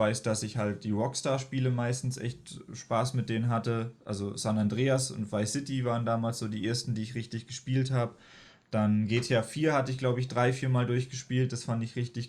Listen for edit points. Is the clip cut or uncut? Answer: uncut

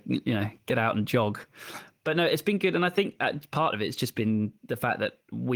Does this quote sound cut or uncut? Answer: uncut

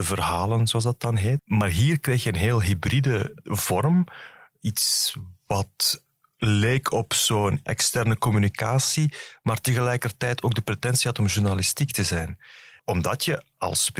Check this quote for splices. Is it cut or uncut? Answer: cut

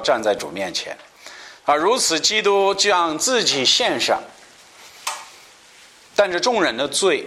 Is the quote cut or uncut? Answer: uncut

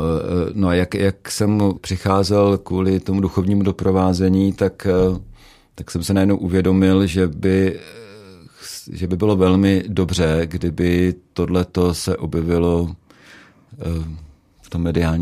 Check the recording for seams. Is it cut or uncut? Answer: cut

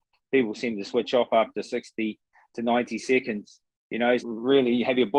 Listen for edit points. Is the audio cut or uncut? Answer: cut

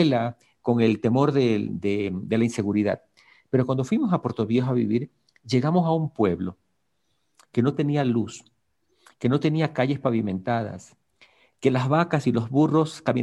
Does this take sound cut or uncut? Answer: uncut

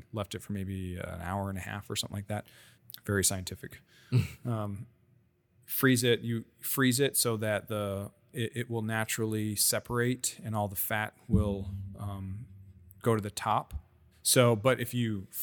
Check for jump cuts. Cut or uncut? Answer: uncut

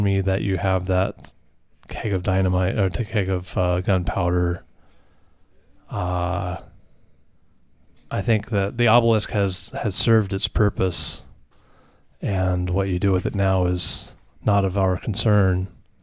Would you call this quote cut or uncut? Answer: uncut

